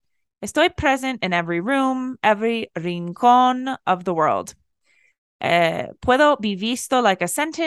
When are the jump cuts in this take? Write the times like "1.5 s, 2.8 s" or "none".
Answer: none